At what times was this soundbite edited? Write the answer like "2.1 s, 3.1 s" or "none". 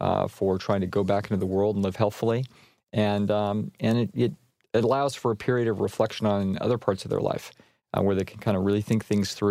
none